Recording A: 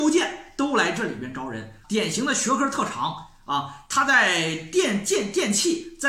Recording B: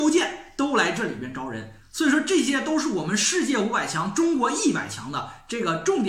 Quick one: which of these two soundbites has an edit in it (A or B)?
A